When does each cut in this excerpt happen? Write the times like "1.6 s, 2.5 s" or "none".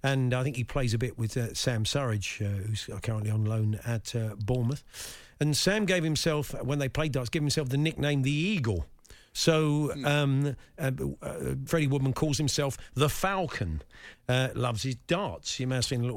11.7 s, 14.1 s